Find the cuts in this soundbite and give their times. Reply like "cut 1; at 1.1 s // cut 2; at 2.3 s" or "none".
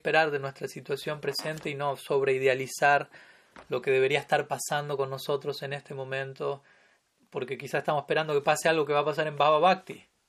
none